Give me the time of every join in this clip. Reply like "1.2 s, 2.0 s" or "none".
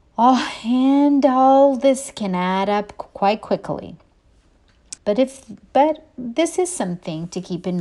5.0 s